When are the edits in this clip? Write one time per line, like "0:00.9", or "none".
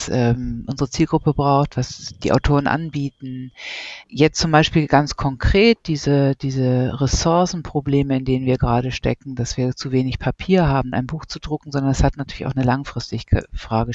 0:04.0
0:10.9